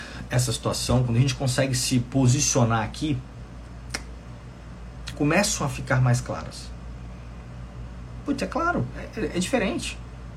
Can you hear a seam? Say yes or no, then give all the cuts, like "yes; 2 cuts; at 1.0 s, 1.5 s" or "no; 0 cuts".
yes; 2 cuts; at 5.1 s, 8.3 s